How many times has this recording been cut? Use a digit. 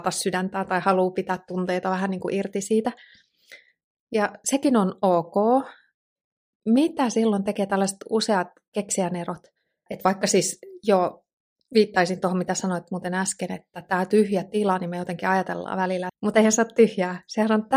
2